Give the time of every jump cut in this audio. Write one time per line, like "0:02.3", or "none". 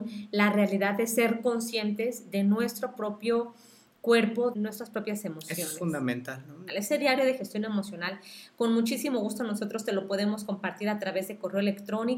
0:04.5
0:06.7